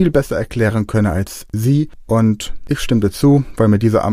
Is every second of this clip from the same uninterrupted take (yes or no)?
yes